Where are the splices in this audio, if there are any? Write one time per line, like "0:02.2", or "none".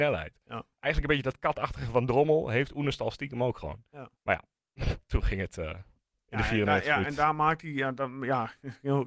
0:04.2